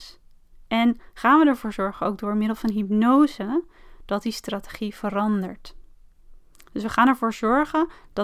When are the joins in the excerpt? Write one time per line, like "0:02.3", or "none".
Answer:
none